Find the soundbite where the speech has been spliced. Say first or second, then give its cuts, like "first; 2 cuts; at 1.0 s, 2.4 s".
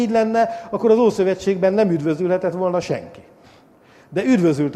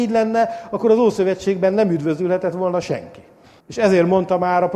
second; 1 cut; at 3.6 s